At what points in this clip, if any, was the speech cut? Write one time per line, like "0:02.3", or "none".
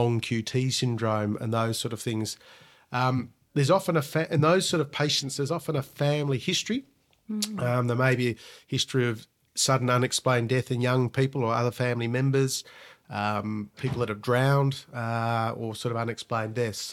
0:13.7